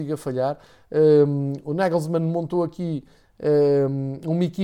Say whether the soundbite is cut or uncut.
uncut